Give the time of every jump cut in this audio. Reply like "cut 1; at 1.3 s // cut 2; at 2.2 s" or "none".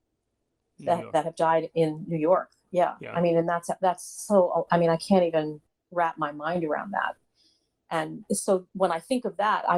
cut 1; at 8.3 s